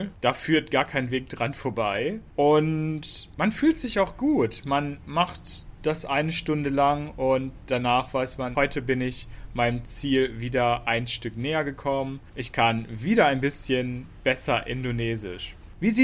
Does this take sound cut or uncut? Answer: cut